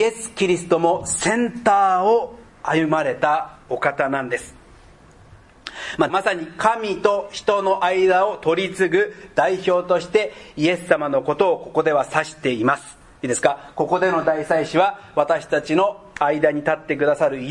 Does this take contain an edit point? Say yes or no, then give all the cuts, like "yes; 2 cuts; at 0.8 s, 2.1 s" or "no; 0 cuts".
yes; 1 cut; at 6.1 s